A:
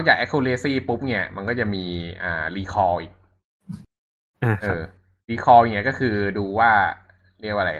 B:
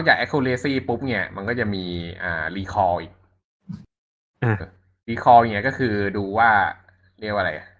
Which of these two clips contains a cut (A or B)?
B